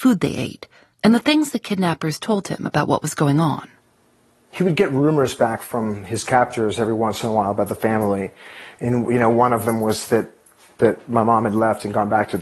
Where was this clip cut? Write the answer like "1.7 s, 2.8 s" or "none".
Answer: 0.9 s